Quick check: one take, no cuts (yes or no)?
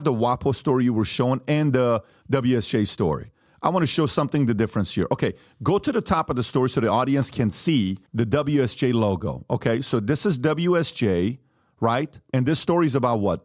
no